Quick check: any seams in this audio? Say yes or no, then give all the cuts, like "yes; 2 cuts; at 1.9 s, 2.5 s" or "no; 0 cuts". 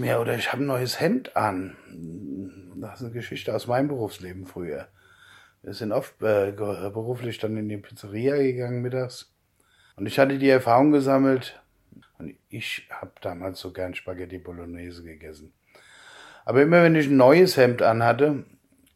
yes; 2 cuts; at 9.9 s, 12.0 s